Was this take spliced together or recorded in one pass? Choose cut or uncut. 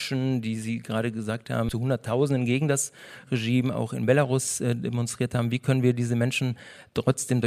uncut